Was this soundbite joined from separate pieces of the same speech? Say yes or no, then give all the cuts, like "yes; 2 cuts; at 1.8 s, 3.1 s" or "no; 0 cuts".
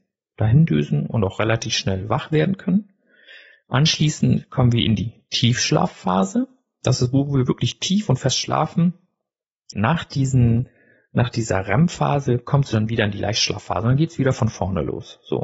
yes; 1 cut; at 9.7 s